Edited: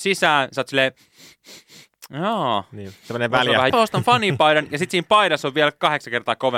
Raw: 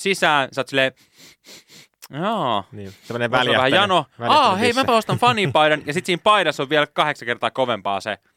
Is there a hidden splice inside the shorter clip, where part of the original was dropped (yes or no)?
yes